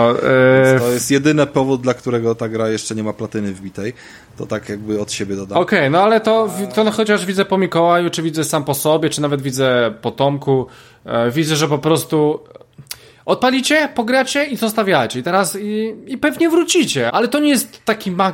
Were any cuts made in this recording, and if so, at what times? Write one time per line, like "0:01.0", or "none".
0:17.1